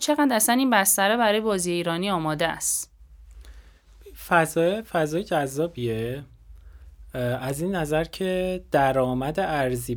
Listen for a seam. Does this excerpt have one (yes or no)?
no